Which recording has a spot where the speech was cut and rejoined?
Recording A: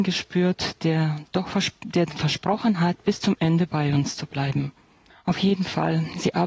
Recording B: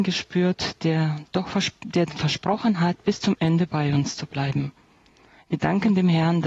A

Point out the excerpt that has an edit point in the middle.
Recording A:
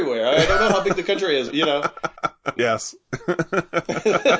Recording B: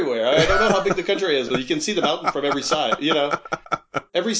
A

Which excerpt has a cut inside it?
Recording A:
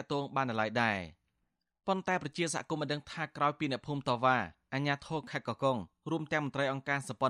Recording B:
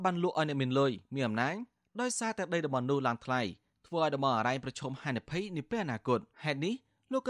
B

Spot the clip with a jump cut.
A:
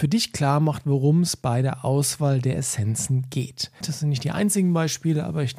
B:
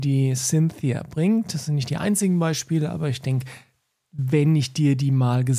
A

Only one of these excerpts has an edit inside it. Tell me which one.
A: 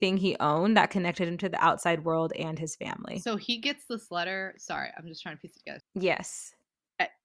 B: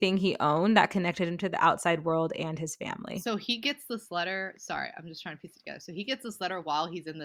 A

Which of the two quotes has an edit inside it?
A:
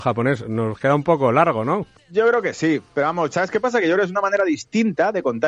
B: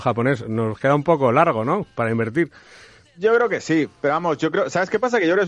A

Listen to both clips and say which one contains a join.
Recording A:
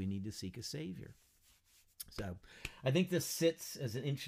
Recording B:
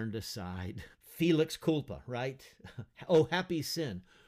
B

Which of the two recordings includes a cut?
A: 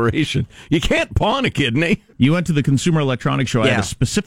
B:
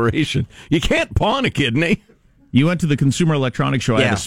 A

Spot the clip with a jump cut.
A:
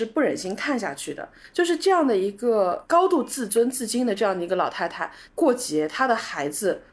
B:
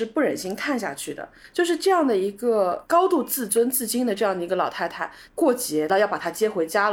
B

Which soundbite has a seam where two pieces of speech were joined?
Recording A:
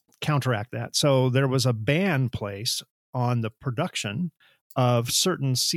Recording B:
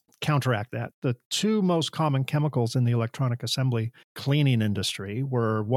B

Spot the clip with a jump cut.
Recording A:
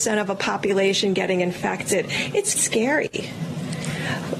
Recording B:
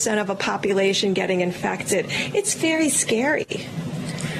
A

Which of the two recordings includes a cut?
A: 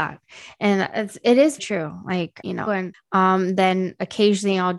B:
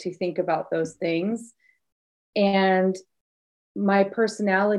A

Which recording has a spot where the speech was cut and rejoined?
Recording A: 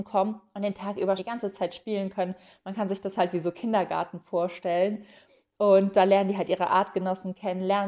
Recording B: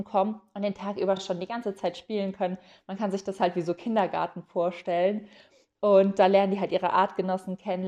A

